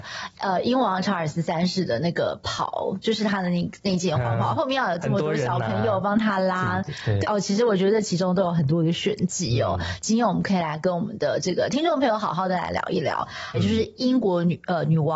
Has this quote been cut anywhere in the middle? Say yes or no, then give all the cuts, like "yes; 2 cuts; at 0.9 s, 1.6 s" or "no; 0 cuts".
yes; 2 cuts; at 7.2 s, 13.5 s